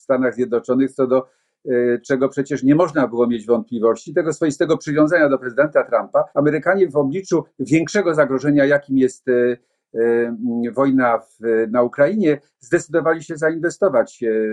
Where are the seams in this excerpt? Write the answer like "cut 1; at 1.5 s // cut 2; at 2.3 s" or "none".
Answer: cut 1; at 6.3 s

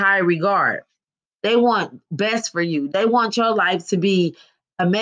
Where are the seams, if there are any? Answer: cut 1; at 1.4 s

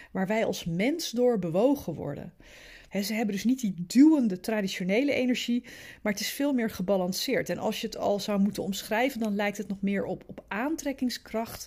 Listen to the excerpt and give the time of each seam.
cut 1; at 2.9 s

